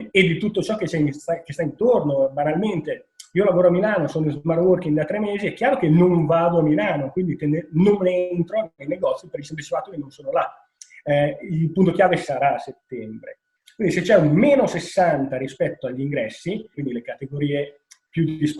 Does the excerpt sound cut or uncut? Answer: cut